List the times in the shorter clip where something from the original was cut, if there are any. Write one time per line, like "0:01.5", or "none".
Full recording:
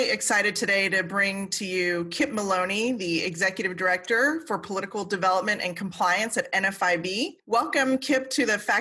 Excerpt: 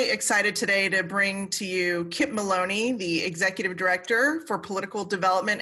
none